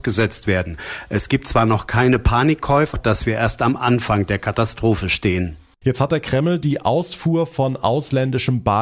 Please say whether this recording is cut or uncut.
cut